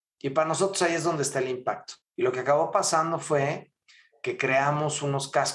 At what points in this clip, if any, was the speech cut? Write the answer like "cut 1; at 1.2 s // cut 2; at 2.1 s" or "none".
cut 1; at 2.0 s